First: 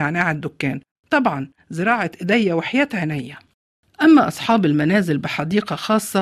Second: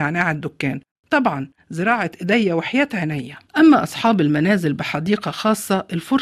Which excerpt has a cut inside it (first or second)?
second